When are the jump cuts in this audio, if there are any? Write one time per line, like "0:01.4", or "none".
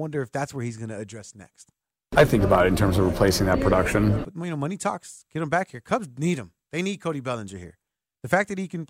0:04.2